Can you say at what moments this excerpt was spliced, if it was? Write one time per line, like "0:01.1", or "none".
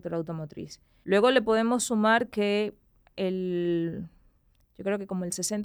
0:01.0

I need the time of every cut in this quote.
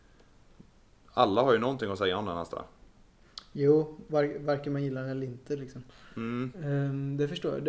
none

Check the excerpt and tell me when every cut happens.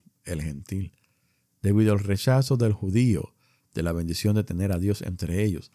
none

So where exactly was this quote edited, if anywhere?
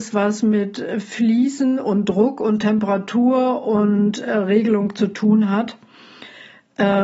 none

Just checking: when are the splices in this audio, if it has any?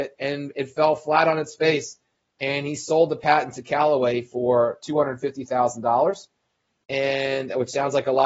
none

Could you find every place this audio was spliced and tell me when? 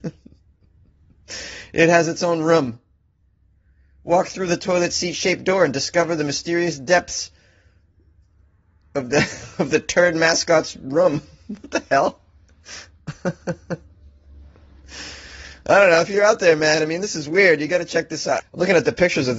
0:18.4

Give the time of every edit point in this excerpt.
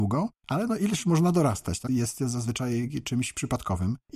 0:01.9

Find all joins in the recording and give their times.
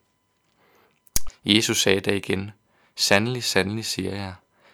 0:01.3

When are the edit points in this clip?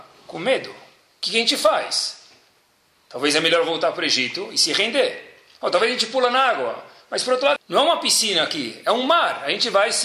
0:07.6

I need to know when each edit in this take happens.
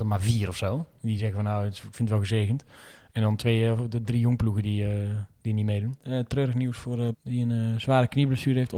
0:06.0
0:07.1

